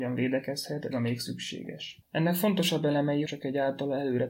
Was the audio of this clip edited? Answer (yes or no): yes